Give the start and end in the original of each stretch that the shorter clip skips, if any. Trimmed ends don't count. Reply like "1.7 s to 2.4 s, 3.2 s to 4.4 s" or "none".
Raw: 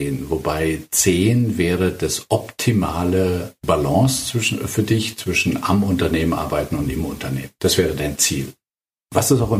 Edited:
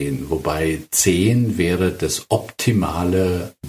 none